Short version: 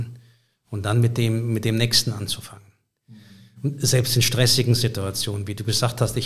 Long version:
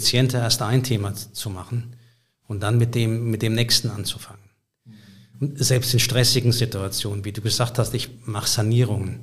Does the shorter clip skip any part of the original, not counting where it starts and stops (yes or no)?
no